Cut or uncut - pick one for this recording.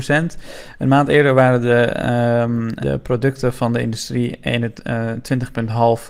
cut